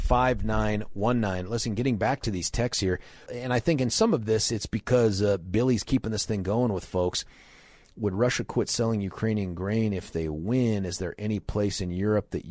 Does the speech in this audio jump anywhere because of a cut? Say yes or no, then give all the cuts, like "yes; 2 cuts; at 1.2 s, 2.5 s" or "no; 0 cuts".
yes; 1 cut; at 3.3 s